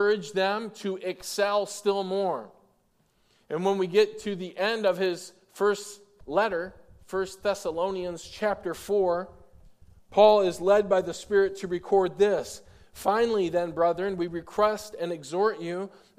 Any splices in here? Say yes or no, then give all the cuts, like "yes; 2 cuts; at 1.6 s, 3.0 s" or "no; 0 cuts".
no; 0 cuts